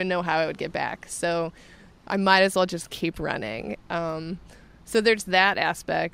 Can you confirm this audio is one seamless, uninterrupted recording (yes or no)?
yes